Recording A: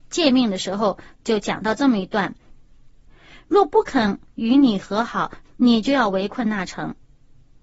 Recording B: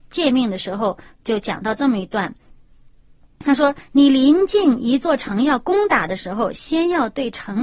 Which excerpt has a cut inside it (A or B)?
A